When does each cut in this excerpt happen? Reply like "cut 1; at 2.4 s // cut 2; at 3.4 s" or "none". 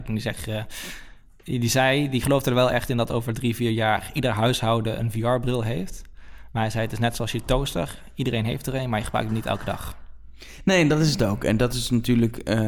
none